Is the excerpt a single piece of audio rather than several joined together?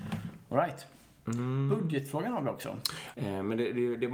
no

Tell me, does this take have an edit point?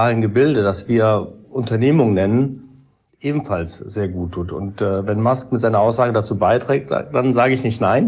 no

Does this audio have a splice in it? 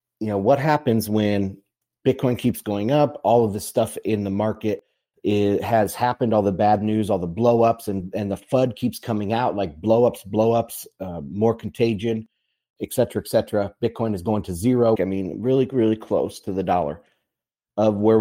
yes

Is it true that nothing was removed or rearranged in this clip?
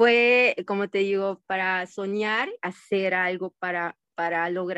no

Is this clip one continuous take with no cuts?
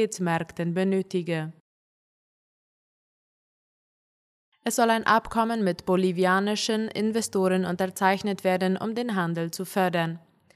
yes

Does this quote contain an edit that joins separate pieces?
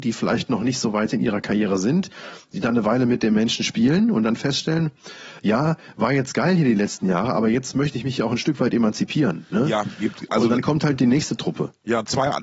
no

